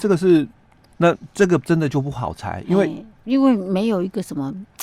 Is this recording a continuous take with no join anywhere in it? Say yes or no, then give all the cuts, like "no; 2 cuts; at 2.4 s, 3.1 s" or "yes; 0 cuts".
no; 1 cut; at 0.9 s